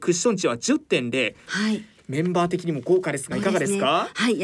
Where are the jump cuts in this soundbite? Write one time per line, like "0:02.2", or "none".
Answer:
0:01.5
0:03.3